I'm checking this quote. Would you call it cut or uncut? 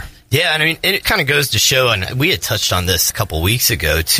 cut